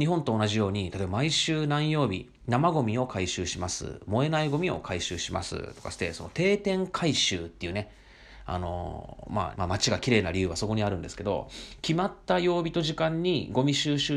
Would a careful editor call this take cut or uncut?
cut